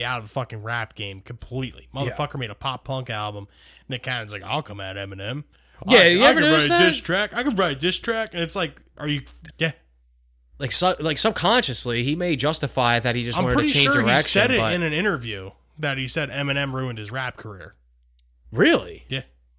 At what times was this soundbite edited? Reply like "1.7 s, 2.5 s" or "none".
9.5 s